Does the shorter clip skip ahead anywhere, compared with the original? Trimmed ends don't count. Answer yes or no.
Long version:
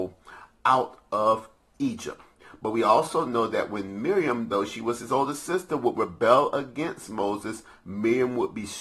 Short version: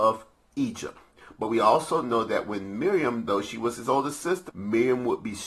yes